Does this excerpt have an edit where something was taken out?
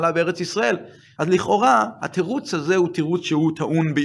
yes; 1 cut; at 1.2 s

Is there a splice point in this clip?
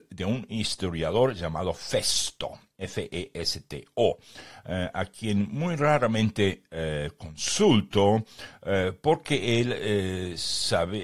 no; 0 cuts

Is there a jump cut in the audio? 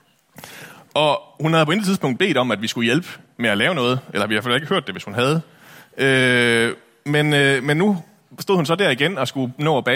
no; 0 cuts

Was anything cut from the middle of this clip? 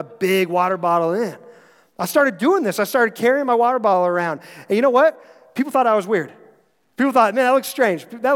no; 0 cuts

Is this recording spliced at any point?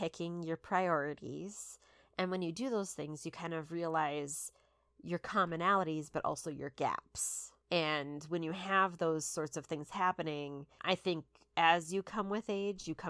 no; 0 cuts

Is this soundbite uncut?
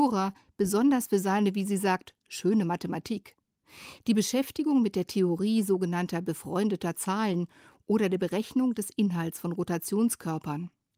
yes; 0 cuts

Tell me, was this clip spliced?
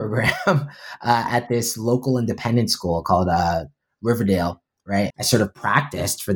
yes; 1 cut; at 5.1 s

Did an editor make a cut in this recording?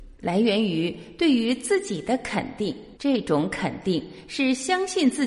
yes; 1 cut; at 3.0 s

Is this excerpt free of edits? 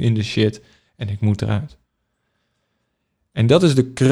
yes; 0 cuts

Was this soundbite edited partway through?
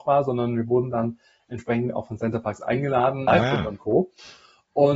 yes; 1 cut; at 3.3 s

